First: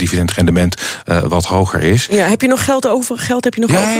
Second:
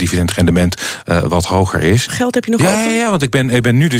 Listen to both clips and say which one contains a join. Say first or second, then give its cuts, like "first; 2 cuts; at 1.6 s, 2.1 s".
second; 1 cut; at 2.1 s